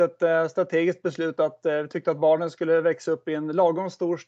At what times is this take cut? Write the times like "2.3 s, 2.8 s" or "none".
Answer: none